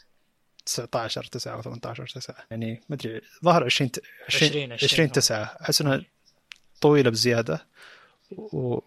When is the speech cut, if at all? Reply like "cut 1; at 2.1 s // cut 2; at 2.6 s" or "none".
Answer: cut 1; at 2.5 s